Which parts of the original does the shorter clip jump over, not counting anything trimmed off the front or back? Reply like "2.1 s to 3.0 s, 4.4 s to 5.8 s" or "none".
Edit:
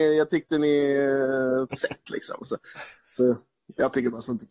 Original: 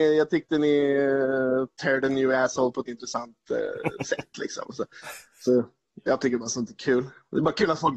1.7 s to 4.0 s